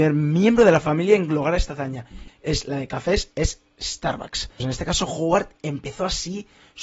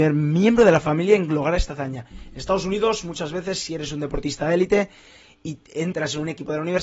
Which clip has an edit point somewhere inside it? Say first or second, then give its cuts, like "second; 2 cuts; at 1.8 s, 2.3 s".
first; 2 cuts; at 2.3 s, 4.6 s